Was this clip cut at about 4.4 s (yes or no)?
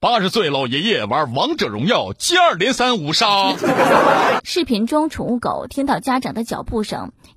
yes